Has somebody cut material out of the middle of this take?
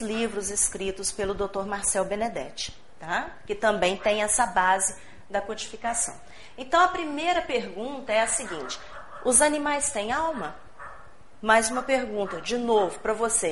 no; 0 cuts

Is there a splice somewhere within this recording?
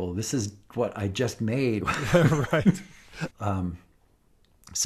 yes; 2 cuts; at 1.8 s, 3.3 s

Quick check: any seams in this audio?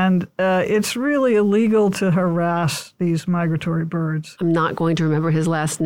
yes; 1 cut; at 4.4 s

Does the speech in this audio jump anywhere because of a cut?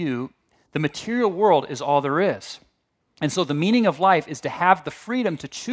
no; 0 cuts

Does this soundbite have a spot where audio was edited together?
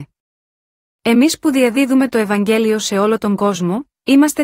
no; 0 cuts

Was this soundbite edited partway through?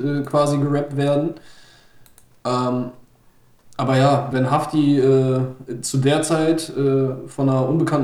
yes; 1 cut; at 4.3 s

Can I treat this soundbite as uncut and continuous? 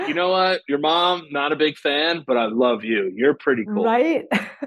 yes; 0 cuts

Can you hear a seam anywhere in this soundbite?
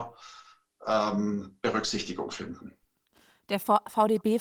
no; 0 cuts

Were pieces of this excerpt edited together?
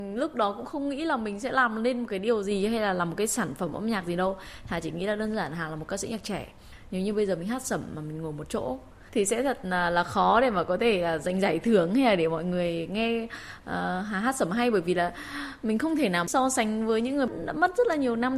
no; 0 cuts

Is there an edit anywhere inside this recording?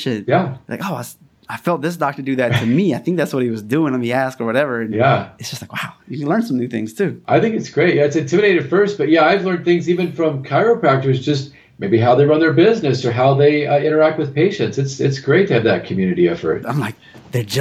yes; 1 cut; at 16.6 s

